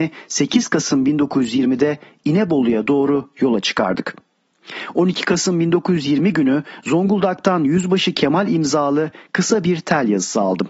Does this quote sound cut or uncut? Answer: uncut